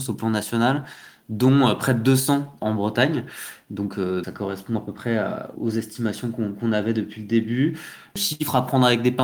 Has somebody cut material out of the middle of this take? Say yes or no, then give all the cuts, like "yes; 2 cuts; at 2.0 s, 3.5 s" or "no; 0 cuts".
yes; 2 cuts; at 4.2 s, 5.6 s